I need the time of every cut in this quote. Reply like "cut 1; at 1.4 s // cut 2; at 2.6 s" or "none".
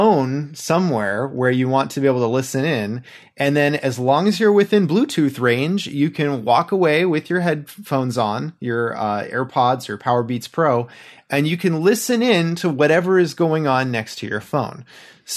none